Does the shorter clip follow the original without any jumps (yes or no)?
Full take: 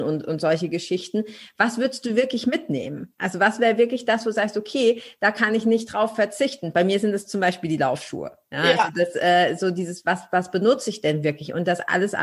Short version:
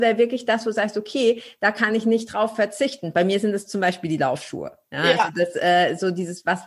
yes